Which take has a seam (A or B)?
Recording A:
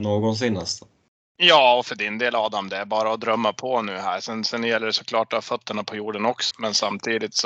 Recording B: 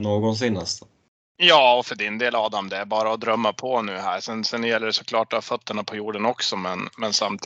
A